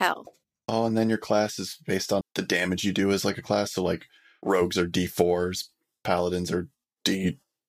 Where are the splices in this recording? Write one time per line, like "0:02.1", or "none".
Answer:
0:02.2